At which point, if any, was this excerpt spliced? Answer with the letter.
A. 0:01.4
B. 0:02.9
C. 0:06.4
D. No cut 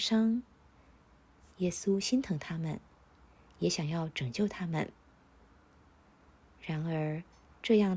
D